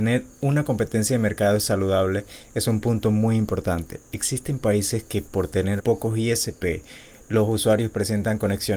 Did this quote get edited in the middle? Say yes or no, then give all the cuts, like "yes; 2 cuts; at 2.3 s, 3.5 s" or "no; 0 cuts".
yes; 1 cut; at 5.8 s